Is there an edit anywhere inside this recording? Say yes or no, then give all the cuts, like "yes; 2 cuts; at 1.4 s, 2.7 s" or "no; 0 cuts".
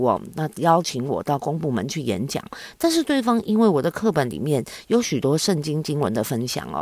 no; 0 cuts